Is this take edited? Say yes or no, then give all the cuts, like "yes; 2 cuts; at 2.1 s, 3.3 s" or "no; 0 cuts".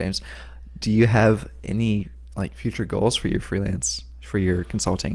no; 0 cuts